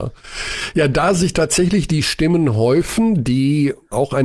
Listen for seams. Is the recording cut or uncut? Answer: uncut